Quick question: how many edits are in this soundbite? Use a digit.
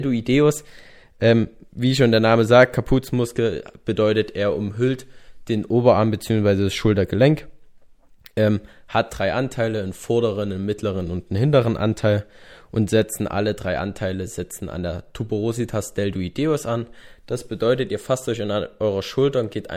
0